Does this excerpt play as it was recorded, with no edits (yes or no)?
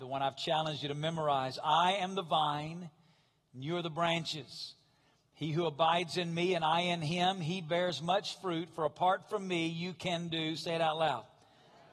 yes